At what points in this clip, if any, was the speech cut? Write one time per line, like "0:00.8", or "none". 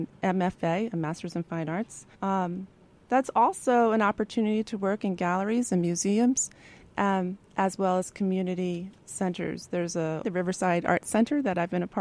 0:02.1
0:10.2